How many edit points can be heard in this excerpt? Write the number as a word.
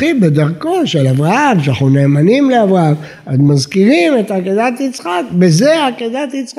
zero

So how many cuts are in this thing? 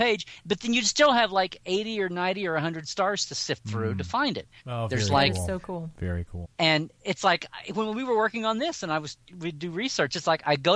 two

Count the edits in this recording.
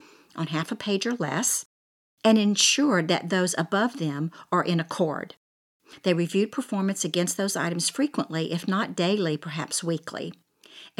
zero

